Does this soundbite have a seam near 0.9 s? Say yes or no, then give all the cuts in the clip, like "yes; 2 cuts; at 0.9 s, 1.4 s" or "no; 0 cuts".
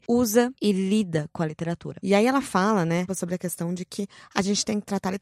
no; 1 cut; at 3.1 s